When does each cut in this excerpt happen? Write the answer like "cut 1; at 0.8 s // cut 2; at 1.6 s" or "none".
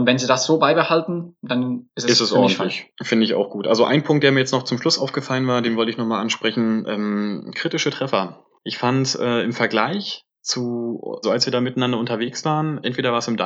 cut 1; at 11.2 s